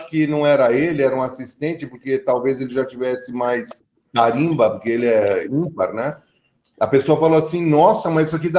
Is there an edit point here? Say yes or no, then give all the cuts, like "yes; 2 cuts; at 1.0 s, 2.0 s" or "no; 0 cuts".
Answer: no; 0 cuts